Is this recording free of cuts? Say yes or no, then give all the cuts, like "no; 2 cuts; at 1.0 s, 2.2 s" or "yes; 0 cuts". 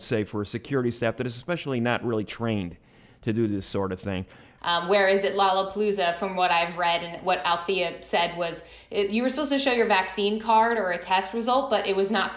no; 1 cut; at 4.6 s